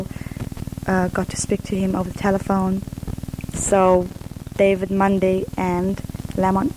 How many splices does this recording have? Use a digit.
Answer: 2